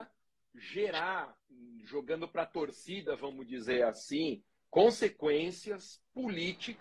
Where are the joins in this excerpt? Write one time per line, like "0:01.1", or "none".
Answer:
none